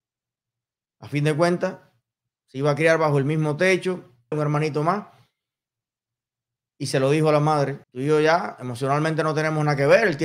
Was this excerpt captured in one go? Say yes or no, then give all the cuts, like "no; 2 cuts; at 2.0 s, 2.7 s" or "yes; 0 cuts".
no; 2 cuts; at 4.3 s, 7.8 s